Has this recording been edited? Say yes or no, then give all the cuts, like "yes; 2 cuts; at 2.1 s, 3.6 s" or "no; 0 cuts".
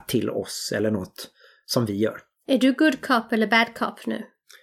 no; 0 cuts